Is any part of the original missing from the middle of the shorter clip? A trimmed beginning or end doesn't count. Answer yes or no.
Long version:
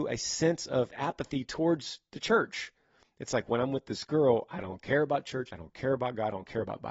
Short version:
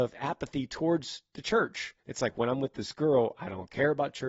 yes